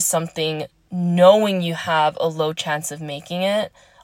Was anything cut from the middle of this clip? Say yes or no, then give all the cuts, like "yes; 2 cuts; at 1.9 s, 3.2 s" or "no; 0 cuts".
no; 0 cuts